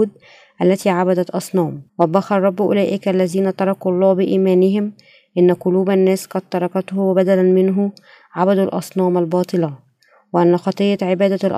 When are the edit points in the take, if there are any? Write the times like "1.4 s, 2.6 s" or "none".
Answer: 1.9 s